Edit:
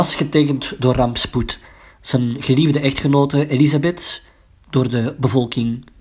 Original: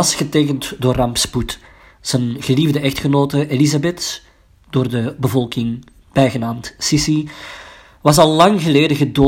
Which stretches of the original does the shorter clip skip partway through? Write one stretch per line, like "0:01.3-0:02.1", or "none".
none